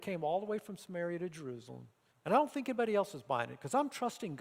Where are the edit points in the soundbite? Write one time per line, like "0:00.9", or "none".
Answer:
0:02.1